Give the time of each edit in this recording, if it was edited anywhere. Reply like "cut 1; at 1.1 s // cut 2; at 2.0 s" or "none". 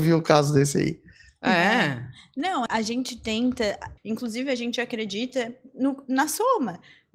cut 1; at 2.7 s // cut 2; at 4.0 s